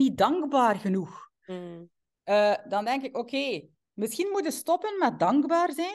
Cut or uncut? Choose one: uncut